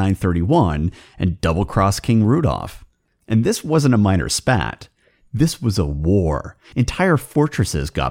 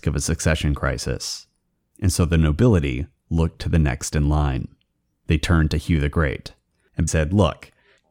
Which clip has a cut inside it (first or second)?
second